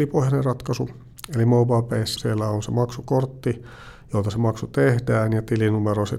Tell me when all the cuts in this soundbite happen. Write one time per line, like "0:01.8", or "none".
0:02.2